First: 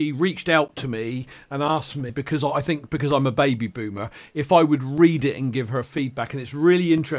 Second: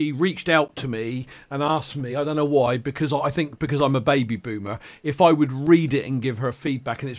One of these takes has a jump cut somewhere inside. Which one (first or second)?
first